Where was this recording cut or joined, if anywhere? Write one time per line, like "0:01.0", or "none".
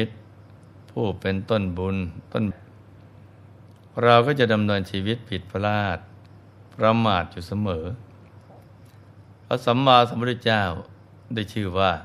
0:02.5